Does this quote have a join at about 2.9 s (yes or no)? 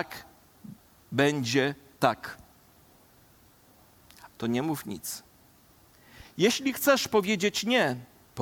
no